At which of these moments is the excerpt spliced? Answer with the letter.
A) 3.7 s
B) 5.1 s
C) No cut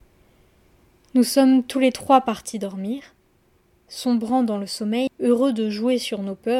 B